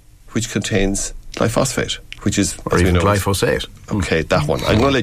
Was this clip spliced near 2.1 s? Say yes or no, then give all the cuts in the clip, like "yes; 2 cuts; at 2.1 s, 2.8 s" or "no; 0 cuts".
yes; 1 cut; at 2.1 s